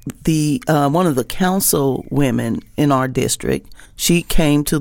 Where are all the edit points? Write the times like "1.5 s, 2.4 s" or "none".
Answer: 3.8 s